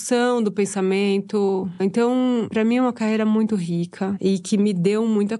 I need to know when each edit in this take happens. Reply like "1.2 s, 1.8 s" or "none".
none